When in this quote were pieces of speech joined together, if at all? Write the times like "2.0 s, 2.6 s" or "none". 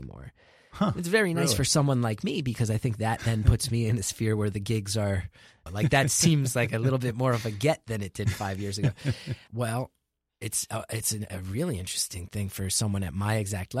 5.7 s, 9.5 s